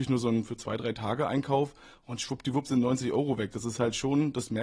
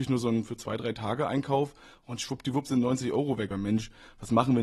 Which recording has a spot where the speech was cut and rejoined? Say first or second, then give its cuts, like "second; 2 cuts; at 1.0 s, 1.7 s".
second; 1 cut; at 3.5 s